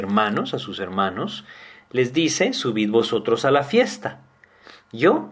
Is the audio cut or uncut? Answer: uncut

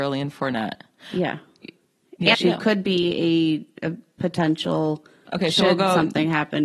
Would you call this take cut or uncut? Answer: cut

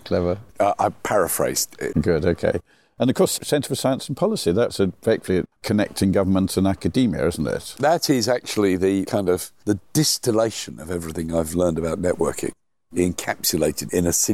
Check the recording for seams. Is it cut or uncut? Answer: cut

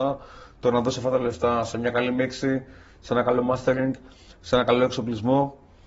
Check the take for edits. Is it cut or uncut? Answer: uncut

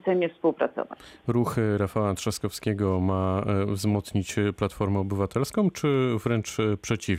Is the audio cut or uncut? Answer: uncut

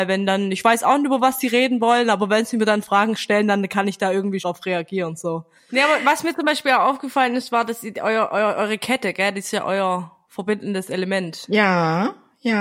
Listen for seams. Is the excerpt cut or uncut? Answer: cut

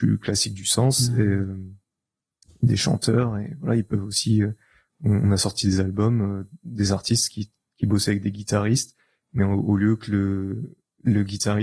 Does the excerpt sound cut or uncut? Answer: uncut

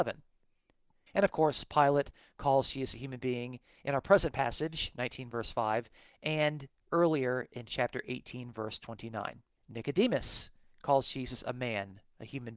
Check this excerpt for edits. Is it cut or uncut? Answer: cut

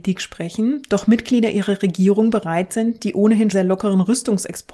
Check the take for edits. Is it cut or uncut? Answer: cut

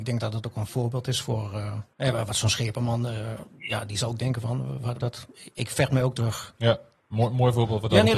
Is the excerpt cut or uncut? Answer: cut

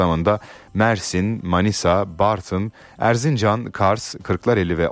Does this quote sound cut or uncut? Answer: uncut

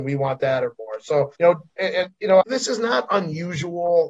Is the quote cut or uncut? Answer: cut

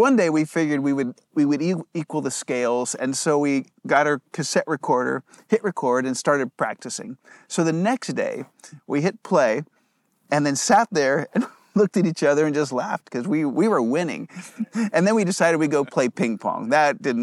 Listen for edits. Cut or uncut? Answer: cut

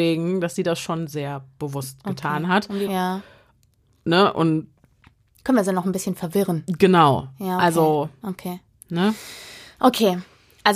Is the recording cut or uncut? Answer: cut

